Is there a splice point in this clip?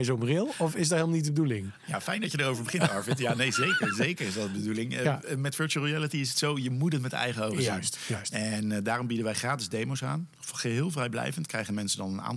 no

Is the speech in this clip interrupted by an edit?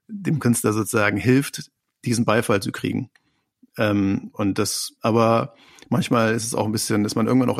yes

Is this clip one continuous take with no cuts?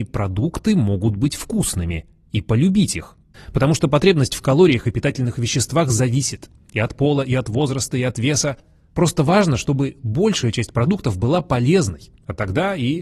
no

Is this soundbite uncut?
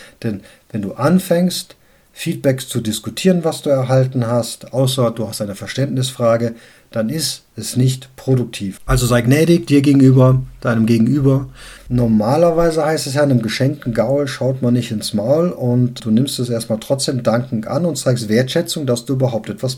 no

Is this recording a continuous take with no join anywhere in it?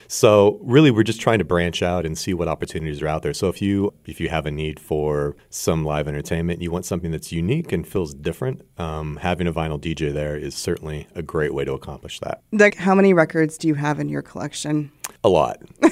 no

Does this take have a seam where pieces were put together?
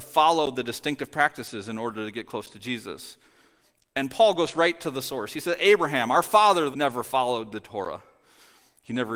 yes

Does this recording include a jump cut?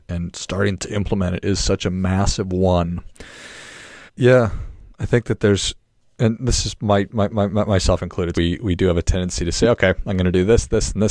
yes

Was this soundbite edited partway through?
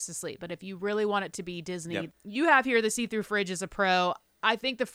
yes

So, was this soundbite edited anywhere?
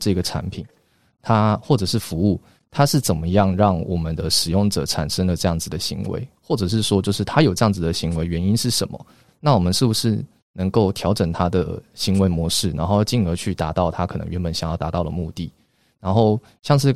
no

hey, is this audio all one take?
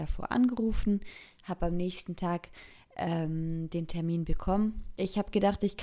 yes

